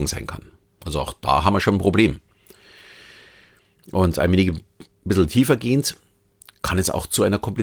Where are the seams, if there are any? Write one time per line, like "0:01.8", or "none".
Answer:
none